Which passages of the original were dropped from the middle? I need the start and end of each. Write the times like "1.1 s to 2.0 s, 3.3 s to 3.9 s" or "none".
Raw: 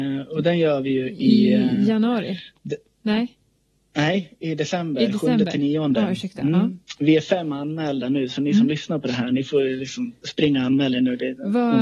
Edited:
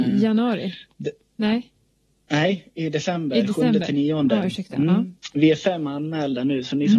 none